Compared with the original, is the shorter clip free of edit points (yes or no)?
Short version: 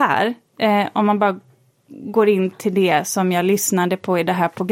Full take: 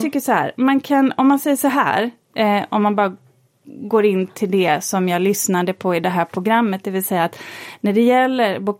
yes